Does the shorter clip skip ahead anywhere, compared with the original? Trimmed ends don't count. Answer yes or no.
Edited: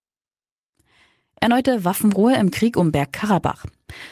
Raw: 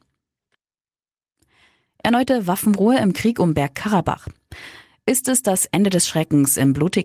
no